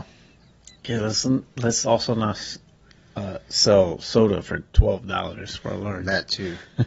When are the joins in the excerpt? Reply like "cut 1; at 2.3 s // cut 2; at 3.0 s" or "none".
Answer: none